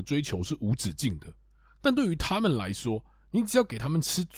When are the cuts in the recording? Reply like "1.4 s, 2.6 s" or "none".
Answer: none